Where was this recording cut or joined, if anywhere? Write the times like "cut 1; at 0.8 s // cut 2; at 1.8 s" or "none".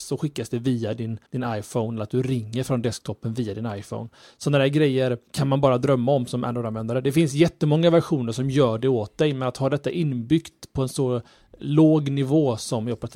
cut 1; at 1.3 s // cut 2; at 5.3 s